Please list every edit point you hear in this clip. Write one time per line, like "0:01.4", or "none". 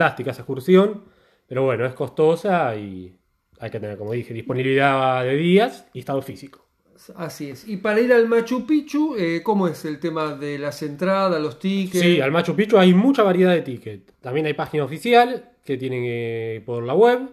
none